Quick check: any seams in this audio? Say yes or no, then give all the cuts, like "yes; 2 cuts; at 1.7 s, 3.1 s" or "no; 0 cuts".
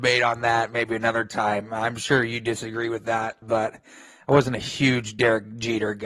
yes; 1 cut; at 3.4 s